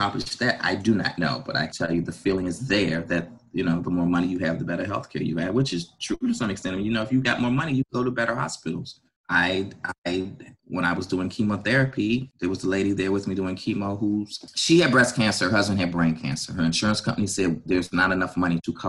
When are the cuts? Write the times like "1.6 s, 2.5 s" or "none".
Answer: 1.7 s